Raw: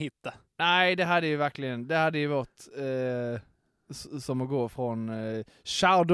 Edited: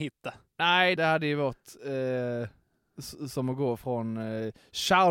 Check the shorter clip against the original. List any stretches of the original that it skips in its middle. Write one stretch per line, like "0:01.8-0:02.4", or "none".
0:01.0-0:01.9